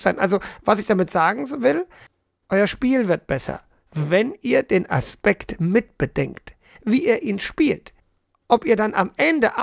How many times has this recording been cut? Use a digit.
2